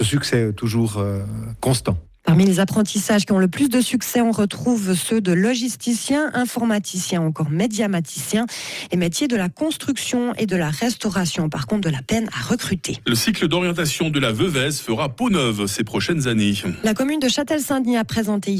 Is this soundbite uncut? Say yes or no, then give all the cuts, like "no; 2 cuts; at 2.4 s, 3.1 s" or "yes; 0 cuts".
yes; 0 cuts